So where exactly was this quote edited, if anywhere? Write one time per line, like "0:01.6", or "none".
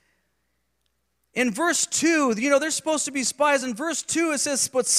none